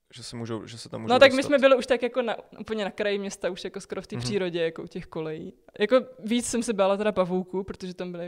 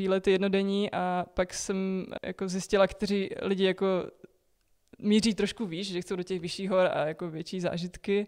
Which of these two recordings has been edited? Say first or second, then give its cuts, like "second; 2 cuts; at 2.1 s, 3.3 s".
second; 1 cut; at 2.2 s